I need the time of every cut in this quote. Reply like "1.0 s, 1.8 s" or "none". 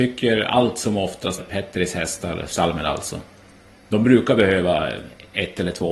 1.4 s